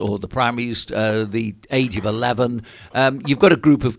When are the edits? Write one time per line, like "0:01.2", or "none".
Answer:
none

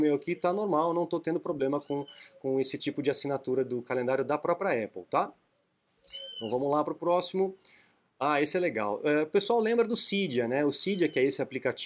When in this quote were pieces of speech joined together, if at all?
none

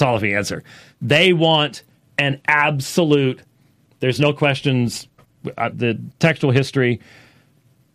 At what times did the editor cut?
0:05.7

